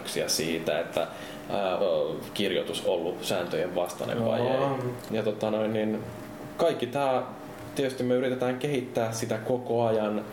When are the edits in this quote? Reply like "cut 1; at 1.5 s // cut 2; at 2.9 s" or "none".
cut 1; at 1.8 s // cut 2; at 5.1 s

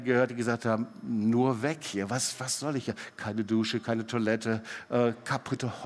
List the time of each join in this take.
none

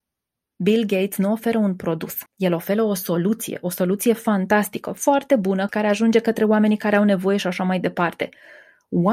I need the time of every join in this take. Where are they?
cut 1; at 2.3 s // cut 2; at 5.7 s

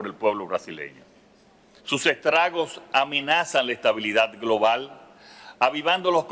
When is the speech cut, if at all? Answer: cut 1; at 1.8 s

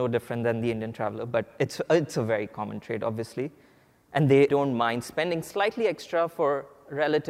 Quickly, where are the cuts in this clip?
cut 1; at 4.5 s

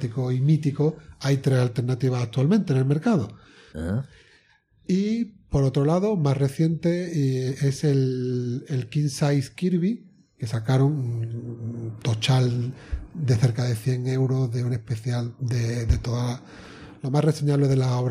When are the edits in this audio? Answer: cut 1; at 3.7 s

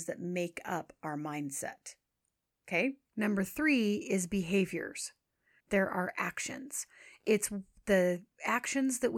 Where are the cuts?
cut 1; at 3.0 s // cut 2; at 5.6 s

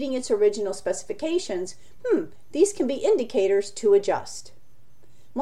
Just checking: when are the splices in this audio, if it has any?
none

